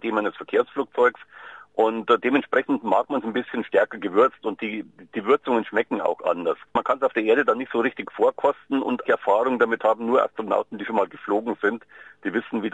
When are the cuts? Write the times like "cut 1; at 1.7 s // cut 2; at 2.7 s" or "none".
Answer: cut 1; at 6.7 s // cut 2; at 9.0 s